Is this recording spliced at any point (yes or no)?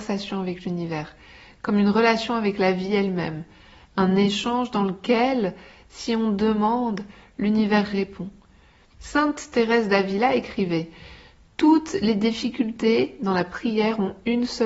yes